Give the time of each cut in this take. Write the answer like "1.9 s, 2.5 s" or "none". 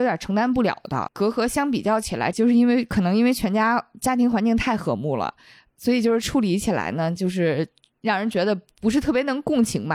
1.1 s, 2.3 s